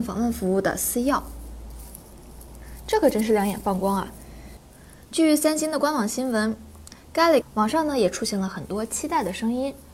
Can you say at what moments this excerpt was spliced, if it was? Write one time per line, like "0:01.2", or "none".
0:05.0
0:07.4